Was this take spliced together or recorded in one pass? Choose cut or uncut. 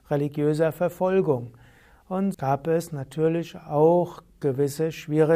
cut